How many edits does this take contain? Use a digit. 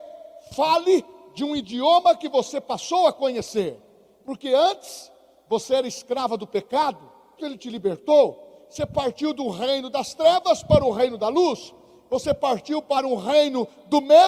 1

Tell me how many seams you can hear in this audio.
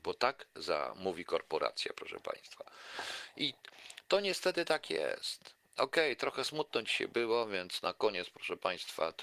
0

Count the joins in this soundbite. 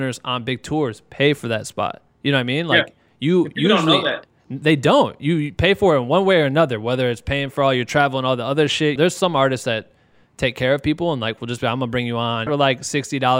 2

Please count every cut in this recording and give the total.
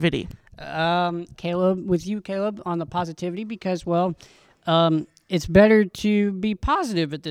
1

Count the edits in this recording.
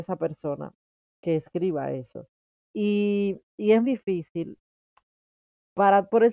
2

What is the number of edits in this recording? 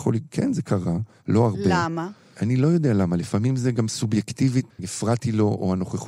1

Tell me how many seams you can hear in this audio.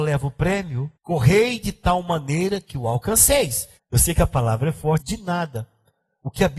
3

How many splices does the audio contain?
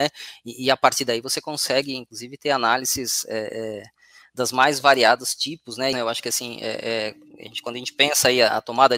1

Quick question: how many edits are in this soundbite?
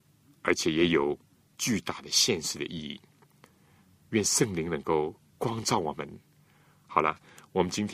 1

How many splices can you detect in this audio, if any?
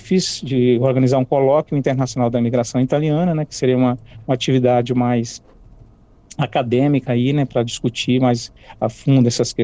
0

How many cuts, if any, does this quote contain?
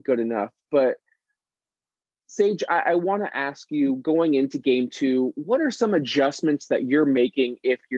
0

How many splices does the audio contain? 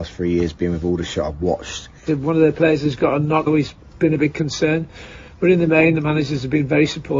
2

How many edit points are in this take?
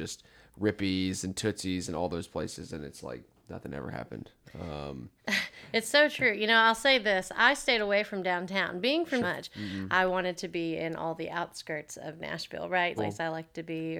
2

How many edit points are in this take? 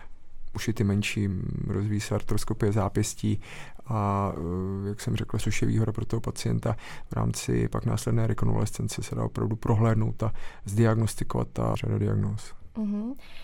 2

